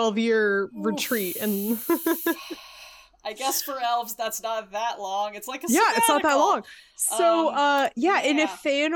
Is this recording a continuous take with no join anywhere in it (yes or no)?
yes